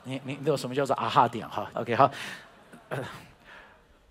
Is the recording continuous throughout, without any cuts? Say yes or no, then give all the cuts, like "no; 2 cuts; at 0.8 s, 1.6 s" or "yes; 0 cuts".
no; 1 cut; at 1.7 s